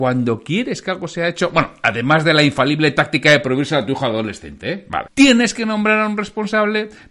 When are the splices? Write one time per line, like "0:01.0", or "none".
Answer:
0:05.1